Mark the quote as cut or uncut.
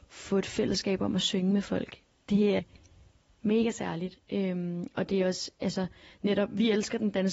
cut